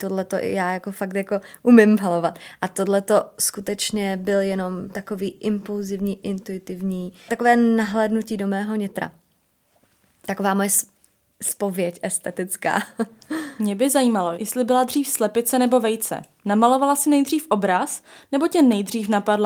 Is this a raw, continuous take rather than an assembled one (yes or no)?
no